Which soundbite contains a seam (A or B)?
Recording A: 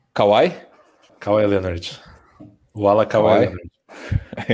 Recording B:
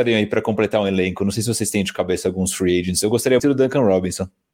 B